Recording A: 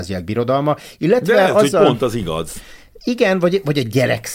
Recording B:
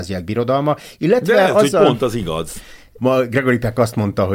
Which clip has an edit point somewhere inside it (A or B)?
B